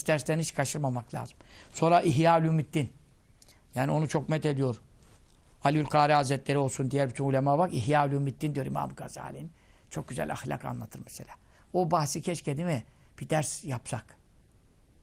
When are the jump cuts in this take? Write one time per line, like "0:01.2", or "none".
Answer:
none